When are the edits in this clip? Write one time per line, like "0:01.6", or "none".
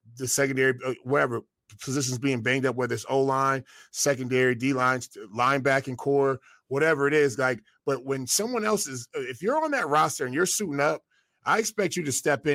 none

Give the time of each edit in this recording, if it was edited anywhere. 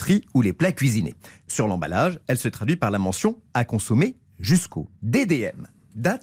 0:05.0

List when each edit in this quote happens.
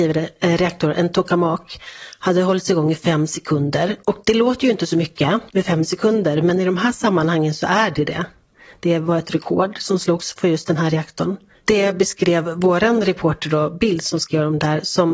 0:11.5

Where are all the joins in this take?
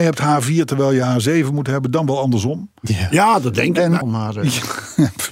0:04.0

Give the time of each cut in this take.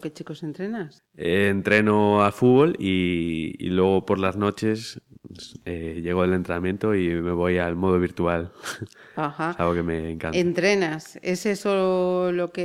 0:01.0

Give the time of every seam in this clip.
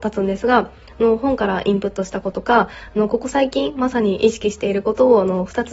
0:02.3

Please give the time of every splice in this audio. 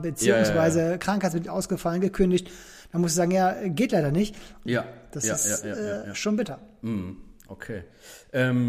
0:04.7

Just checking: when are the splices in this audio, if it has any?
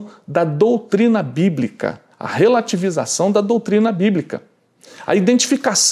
0:02.1

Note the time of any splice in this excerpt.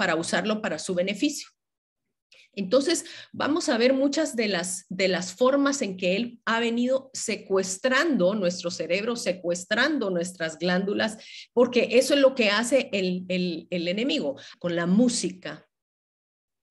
0:14.5

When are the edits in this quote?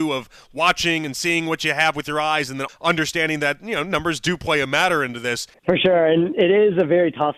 0:02.7
0:05.5

